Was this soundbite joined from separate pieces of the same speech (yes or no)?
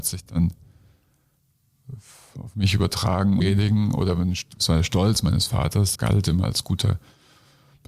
yes